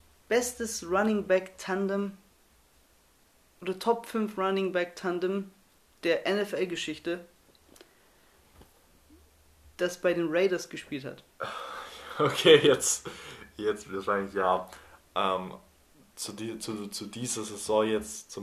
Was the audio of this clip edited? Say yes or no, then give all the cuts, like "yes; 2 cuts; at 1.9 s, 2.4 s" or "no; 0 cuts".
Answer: no; 0 cuts